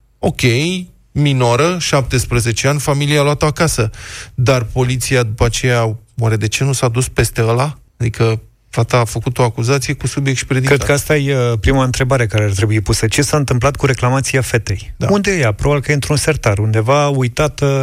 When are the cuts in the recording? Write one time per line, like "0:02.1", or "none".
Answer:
0:07.9